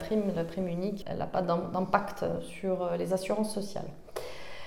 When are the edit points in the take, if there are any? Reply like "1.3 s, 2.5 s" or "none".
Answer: 1.0 s